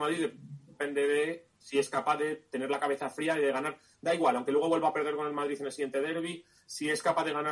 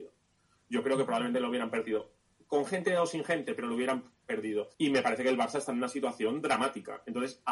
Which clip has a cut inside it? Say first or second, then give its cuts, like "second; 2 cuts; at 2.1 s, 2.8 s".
second; 1 cut; at 4.7 s